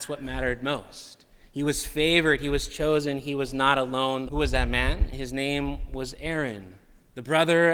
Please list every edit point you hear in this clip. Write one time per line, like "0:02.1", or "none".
0:04.3